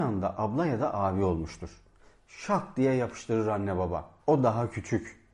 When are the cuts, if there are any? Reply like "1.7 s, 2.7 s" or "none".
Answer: 4.2 s